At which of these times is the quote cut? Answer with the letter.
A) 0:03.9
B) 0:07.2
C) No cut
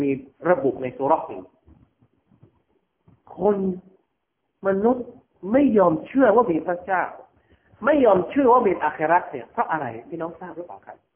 C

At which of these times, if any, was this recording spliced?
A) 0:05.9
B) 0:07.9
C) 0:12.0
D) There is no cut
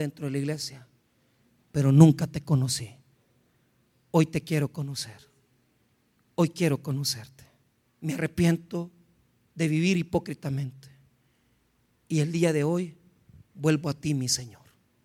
B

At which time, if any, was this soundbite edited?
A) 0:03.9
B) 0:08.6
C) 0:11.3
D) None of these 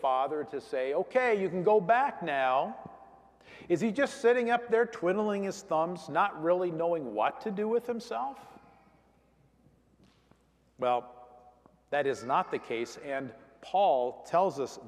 D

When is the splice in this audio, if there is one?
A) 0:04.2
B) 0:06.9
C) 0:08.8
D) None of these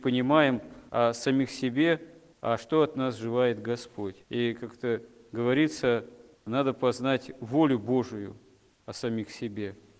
A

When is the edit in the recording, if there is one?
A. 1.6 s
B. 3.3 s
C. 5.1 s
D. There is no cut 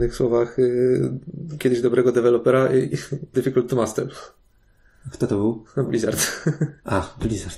B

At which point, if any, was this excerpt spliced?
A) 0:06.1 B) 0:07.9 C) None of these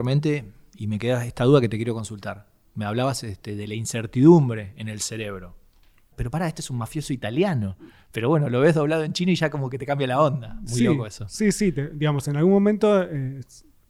A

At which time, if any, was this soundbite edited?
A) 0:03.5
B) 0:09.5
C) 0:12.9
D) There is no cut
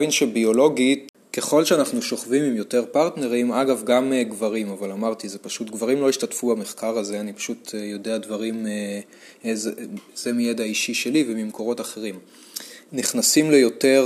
C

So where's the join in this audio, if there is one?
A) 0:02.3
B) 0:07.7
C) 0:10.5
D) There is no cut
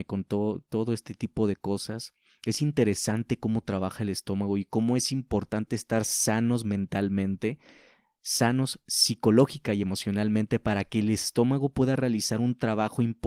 D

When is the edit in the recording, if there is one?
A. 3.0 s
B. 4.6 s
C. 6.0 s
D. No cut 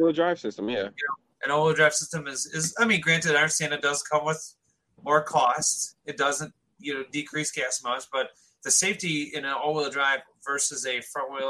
D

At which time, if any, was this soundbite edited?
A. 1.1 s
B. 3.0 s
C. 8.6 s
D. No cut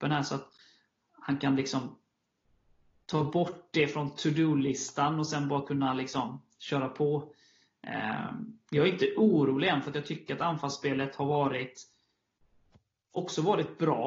D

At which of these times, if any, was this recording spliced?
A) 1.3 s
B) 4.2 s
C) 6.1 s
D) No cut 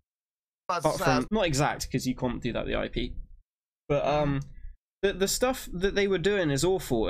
A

